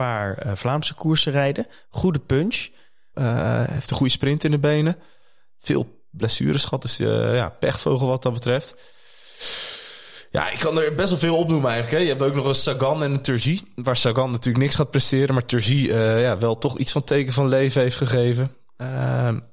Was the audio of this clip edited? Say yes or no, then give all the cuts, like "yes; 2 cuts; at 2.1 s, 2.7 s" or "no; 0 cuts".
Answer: yes; 1 cut; at 3.1 s